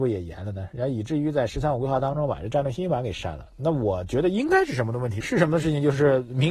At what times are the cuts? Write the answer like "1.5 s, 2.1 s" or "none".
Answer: 5.2 s